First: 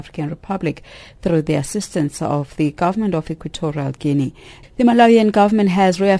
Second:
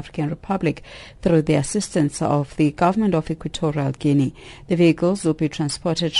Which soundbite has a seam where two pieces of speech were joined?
first; 1 cut; at 4.6 s

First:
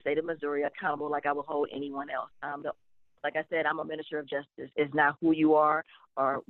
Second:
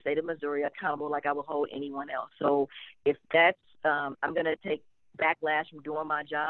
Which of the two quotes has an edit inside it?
first; 2 cuts; at 2.3 s, 4.7 s

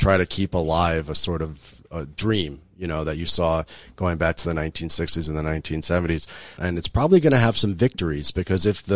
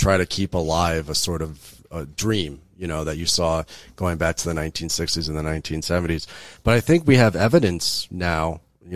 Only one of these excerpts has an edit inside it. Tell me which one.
first; 1 cut; at 6.6 s

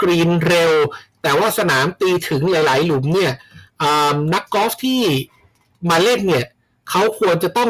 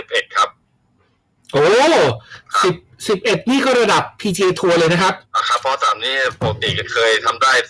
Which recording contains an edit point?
second; 1 cut; at 5.3 s

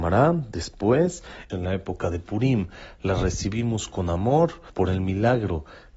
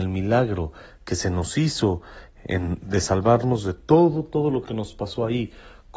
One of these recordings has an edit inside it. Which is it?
first; 2 cuts; at 1.5 s, 4.7 s

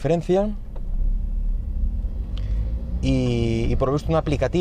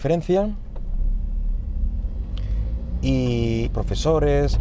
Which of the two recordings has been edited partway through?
second; 1 cut; at 3.7 s

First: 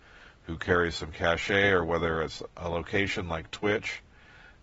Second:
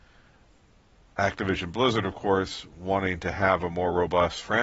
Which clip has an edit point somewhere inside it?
first; 1 cut; at 2.5 s

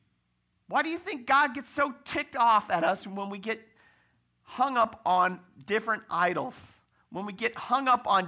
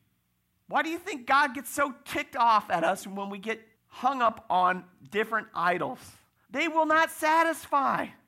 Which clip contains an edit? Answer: second; 2 cuts; at 3.7 s, 6.4 s

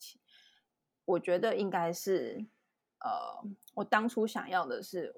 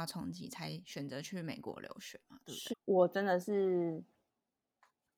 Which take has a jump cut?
second; 1 cut; at 2.7 s

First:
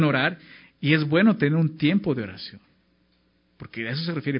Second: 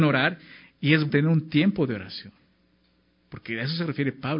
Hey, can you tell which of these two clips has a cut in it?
second; 1 cut; at 1.1 s

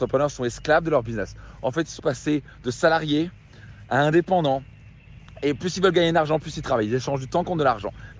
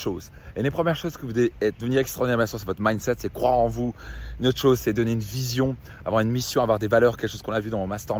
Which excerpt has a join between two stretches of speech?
first; 1 cut; at 2.0 s

